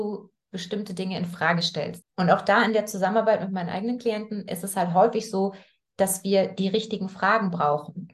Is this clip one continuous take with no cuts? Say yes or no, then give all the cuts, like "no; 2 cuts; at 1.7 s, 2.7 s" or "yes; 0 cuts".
no; 1 cut; at 2.0 s